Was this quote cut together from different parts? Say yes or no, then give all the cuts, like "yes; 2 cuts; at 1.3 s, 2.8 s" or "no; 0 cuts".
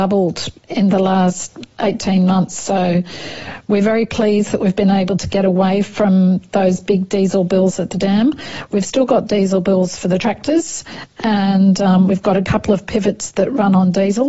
no; 0 cuts